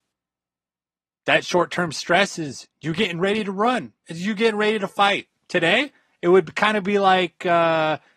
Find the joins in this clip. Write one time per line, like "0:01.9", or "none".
none